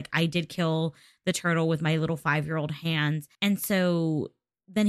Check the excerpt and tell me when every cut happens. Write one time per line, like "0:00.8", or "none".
0:03.3